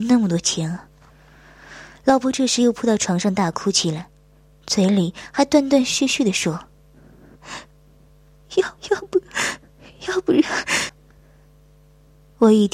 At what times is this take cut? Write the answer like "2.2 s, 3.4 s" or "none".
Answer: 8.8 s, 10.9 s